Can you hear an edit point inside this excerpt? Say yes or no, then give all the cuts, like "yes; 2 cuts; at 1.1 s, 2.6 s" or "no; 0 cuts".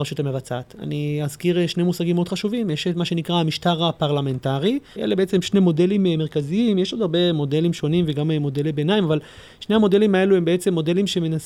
yes; 1 cut; at 4.9 s